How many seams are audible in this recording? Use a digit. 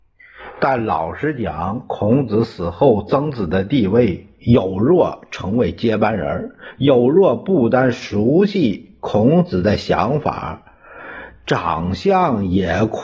1